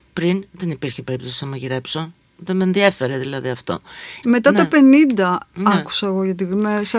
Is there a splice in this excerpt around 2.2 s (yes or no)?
no